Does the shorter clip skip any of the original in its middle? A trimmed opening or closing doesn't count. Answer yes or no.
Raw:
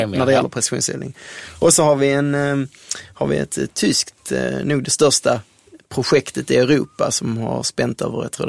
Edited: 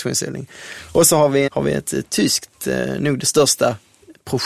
yes